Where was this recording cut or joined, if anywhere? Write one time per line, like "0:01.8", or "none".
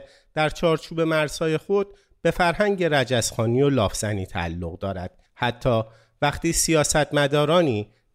0:05.3